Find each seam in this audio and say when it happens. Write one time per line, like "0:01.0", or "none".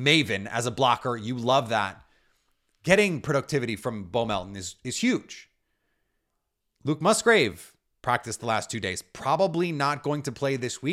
none

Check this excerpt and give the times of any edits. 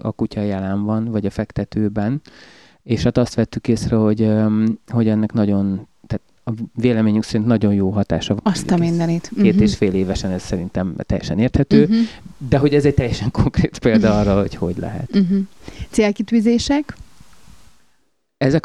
0:08.4

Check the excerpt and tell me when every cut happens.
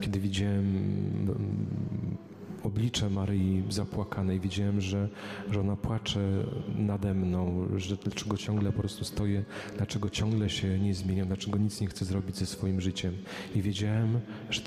none

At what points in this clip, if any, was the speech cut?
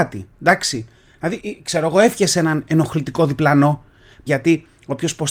0:01.4
0:04.3

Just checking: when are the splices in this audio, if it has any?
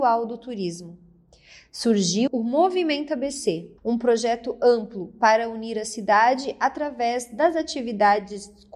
0:02.3
0:03.8

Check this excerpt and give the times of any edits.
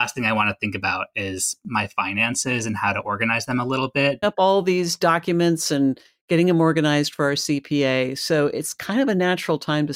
0:04.2

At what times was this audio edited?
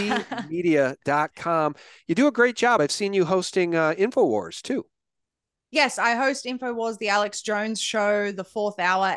none

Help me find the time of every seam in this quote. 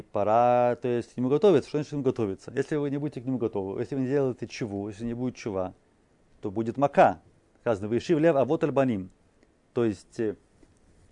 none

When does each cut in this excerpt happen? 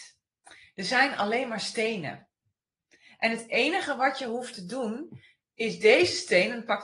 none

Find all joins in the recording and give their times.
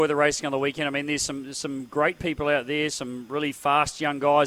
none

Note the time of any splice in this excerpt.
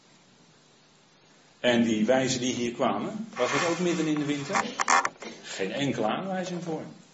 none

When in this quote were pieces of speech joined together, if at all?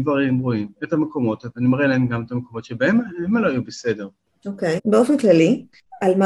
0:04.8

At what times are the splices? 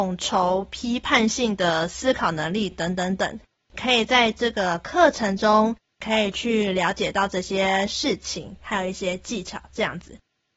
none

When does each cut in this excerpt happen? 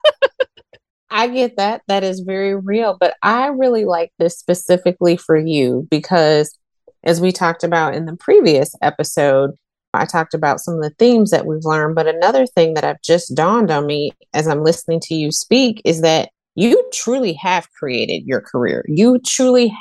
0:09.9

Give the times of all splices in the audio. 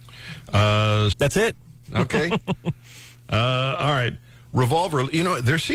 0:01.1

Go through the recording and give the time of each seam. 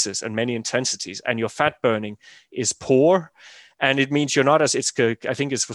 none

